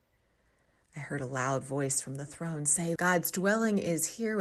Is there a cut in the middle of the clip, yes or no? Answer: yes